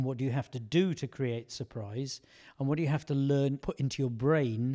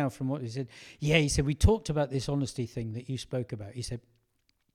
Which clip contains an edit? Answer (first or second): first